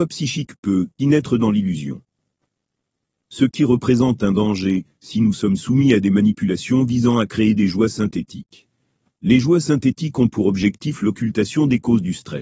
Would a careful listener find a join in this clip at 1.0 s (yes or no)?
yes